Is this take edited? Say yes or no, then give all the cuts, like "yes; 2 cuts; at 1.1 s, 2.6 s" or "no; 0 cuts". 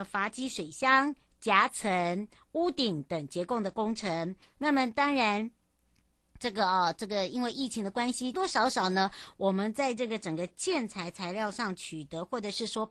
yes; 2 cuts; at 4.4 s, 8.3 s